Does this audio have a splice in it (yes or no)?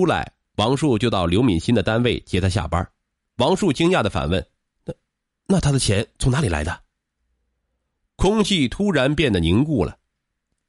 yes